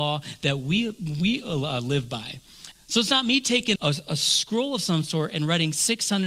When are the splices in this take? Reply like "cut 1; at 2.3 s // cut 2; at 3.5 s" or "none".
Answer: cut 1; at 2.7 s // cut 2; at 3.8 s